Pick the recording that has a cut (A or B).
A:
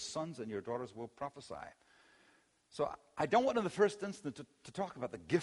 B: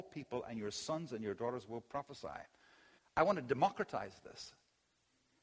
B